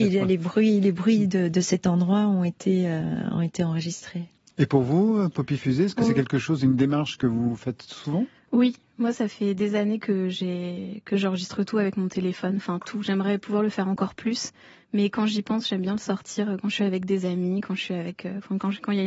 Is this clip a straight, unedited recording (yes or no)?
yes